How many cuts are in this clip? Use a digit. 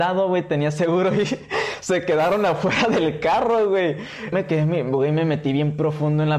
1